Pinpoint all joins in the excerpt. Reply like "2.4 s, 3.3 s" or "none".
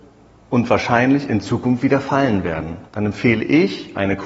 2.9 s